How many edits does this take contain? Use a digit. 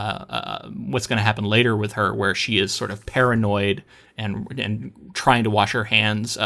0